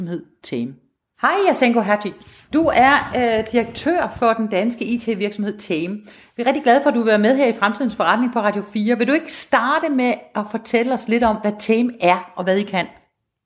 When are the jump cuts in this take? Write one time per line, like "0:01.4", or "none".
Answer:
none